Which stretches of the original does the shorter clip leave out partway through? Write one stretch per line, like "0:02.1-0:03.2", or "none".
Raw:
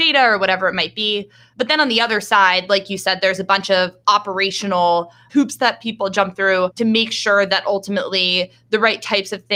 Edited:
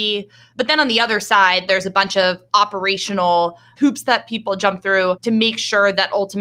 0:02.7-0:03.2